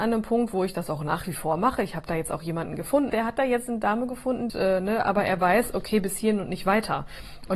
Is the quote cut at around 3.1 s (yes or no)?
yes